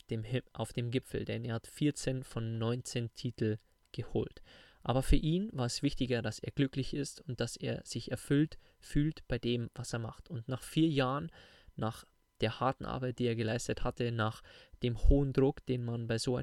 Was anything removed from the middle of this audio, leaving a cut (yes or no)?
no